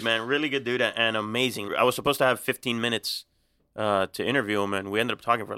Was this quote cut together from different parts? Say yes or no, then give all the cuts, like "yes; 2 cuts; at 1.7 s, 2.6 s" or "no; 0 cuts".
yes; 1 cut; at 1.7 s